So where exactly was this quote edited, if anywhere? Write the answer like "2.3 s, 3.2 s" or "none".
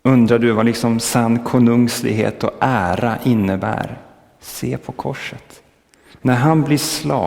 6.2 s

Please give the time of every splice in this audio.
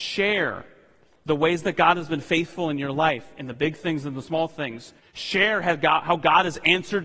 5.0 s

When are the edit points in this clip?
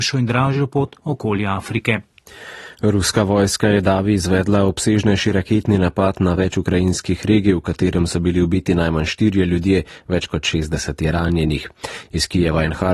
none

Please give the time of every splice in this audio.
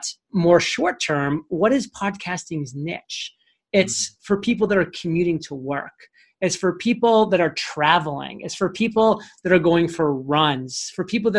none

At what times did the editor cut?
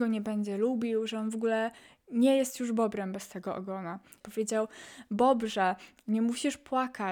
4.2 s

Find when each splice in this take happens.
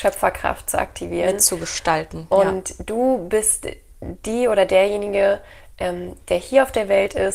none

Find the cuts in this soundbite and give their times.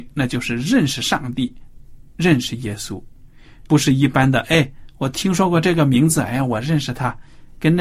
3.7 s

